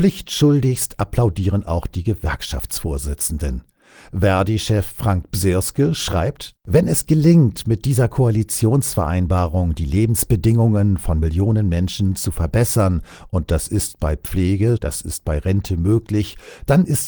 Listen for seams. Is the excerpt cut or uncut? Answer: cut